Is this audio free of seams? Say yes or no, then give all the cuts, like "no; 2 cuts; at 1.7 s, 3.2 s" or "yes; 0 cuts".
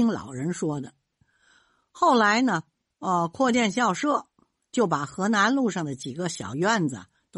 yes; 0 cuts